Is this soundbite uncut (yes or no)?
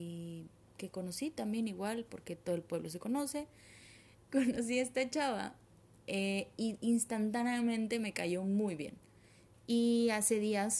no